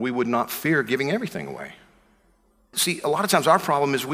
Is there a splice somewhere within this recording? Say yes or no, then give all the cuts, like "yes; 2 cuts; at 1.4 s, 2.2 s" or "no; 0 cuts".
yes; 1 cut; at 2.7 s